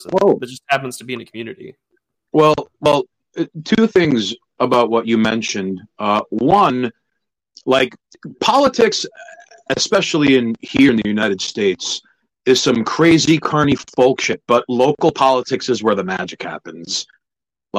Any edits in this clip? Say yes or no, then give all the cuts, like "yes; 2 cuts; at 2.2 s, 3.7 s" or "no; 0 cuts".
no; 0 cuts